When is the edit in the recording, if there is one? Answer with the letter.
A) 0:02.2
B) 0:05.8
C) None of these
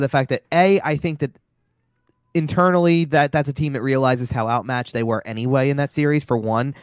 C